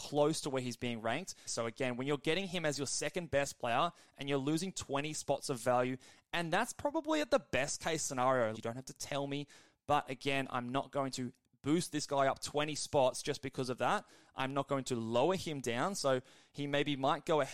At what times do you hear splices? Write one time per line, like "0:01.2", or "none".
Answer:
0:01.5
0:08.5